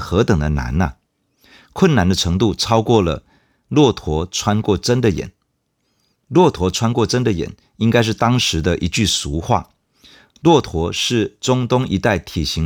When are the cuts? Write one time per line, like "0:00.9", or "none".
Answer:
none